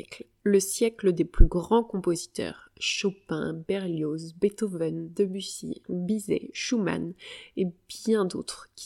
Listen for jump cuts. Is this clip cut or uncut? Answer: cut